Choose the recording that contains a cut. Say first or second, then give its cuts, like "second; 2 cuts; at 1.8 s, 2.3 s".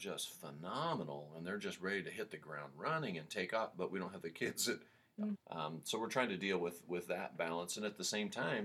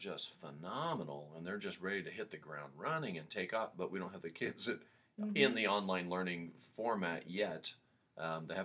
first; 1 cut; at 5.4 s